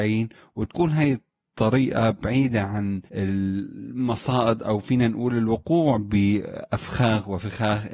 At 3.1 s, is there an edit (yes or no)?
yes